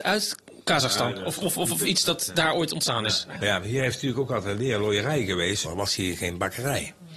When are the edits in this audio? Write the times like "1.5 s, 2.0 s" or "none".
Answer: 1.8 s, 3.3 s, 5.6 s